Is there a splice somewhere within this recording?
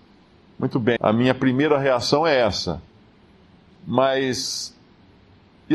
yes; 1 cut; at 1.0 s

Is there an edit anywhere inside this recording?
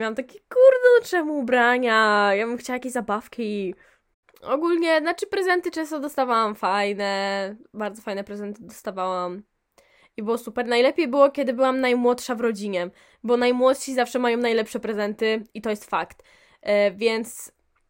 no; 0 cuts

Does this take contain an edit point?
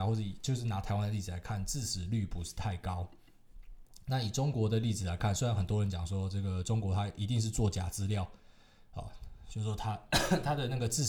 no; 0 cuts

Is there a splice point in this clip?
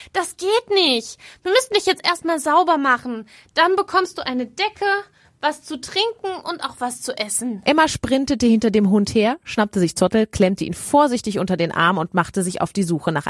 no; 0 cuts

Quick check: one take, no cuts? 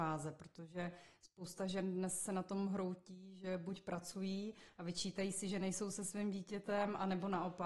yes; 0 cuts

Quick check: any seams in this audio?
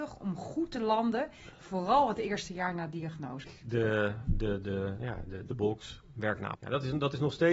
yes; 3 cuts; at 3.4 s, 5.5 s, 6.6 s

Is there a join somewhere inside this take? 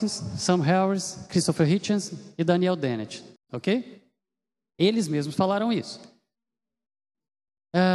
yes; 1 cut; at 3.4 s

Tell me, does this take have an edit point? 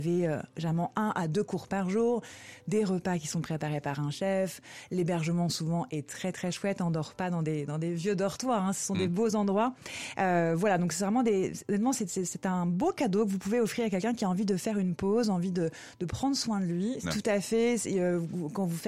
yes; 1 cut; at 17.0 s

